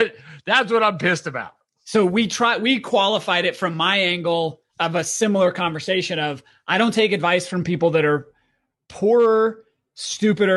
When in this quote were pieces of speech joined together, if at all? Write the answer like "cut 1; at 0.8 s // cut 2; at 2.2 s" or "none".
none